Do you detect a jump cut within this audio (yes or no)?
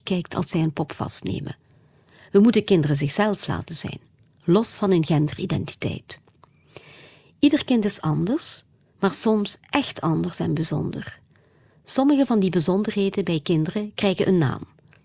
no